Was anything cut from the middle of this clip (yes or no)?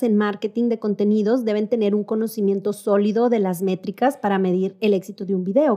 no